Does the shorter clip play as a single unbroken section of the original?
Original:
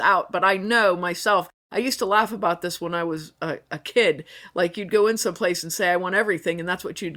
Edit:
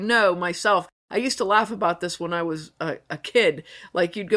yes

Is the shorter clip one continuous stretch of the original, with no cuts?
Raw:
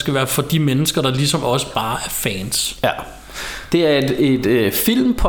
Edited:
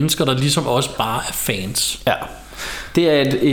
yes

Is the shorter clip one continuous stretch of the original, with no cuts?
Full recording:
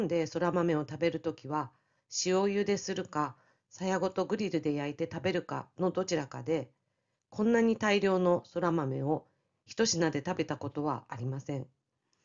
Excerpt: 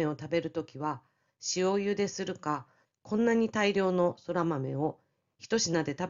no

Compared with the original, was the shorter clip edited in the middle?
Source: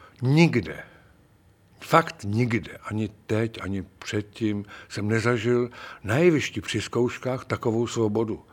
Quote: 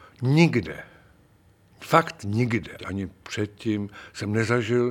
yes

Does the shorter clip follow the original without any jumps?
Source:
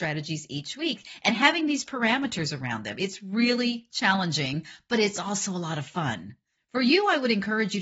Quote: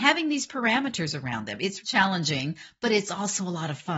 no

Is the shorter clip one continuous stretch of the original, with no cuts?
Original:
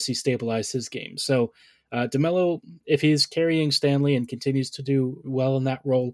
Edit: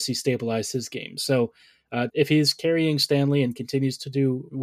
no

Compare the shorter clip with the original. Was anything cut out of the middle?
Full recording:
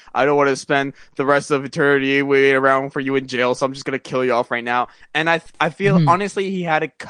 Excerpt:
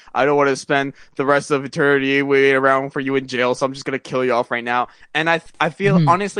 no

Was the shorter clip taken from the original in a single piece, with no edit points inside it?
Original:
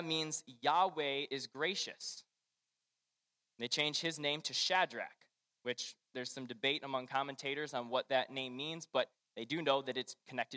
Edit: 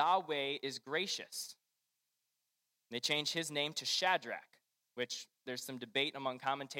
yes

